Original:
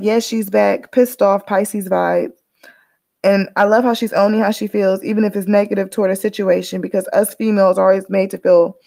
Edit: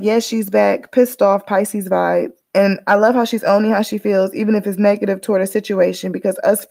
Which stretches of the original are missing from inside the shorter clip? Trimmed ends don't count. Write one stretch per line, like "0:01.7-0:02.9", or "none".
0:02.4-0:03.1